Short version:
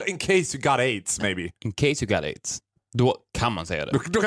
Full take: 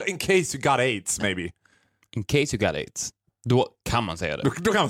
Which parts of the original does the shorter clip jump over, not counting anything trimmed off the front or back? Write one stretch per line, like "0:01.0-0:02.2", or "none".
0:01.6-0:02.1